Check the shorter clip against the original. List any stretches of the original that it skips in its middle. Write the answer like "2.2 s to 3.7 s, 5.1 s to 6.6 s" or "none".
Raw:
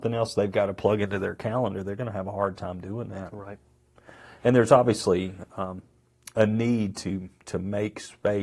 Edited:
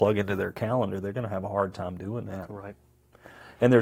none